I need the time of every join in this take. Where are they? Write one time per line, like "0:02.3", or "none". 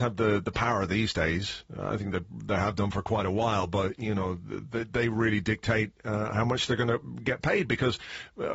none